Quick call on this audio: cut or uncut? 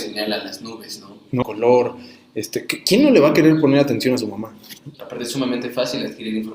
cut